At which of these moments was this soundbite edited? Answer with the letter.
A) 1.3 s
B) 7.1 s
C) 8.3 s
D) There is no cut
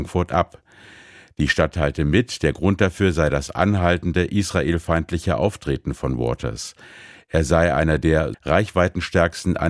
C